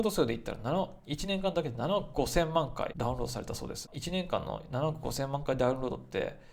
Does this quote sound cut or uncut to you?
uncut